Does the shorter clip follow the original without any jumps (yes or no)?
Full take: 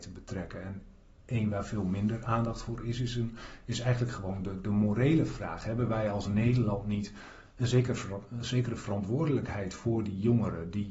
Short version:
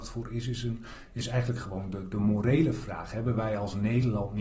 yes